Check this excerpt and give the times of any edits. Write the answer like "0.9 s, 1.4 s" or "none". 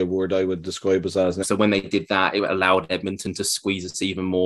1.4 s